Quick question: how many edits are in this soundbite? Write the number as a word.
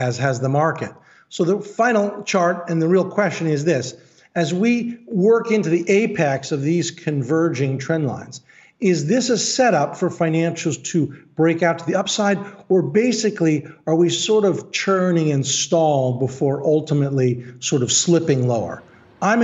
zero